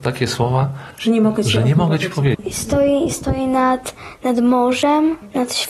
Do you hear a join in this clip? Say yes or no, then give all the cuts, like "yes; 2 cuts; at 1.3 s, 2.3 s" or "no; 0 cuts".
yes; 1 cut; at 2.3 s